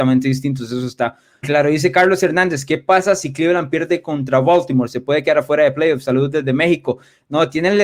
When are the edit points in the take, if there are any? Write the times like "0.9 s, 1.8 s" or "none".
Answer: 1.4 s